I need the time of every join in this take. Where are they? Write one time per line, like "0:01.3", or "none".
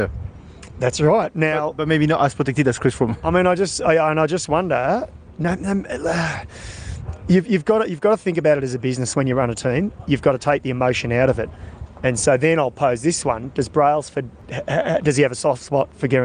none

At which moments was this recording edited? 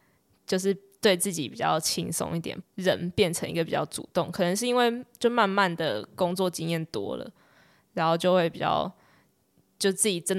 0:02.6

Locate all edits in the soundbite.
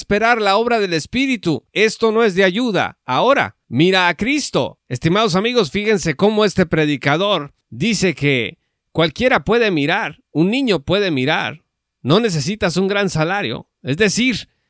0:04.8

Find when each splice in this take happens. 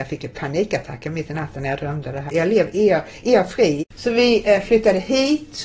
0:02.3
0:03.8

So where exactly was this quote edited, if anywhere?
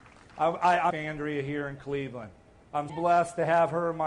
0:00.9
0:02.9

